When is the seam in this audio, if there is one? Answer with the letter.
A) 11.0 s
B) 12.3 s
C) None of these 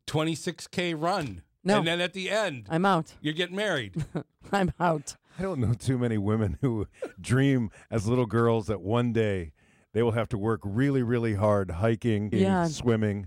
B